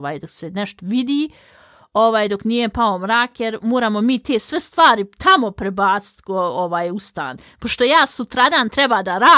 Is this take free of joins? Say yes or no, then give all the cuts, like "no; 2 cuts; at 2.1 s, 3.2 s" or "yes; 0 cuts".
yes; 0 cuts